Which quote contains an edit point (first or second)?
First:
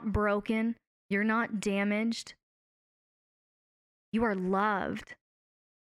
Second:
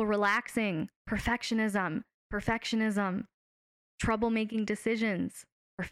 second